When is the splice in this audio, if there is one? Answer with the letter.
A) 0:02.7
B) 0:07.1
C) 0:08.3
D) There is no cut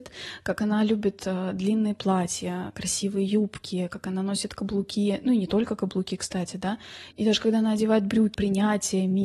C